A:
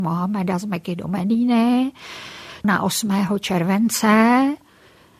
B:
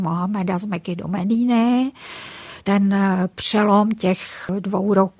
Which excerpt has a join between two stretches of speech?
A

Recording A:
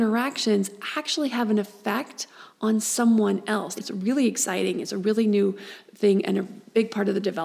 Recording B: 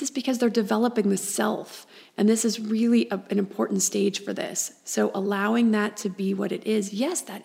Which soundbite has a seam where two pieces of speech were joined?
A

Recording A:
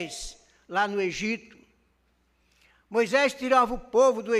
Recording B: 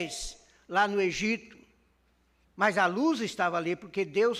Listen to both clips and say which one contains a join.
B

